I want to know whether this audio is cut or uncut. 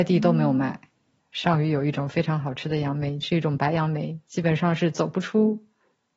cut